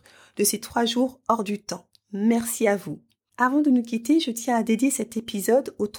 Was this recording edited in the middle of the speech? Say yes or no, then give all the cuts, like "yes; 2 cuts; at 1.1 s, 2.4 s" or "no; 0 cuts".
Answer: yes; 1 cut; at 3.3 s